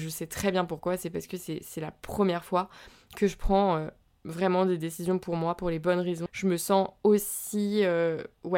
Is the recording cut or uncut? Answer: cut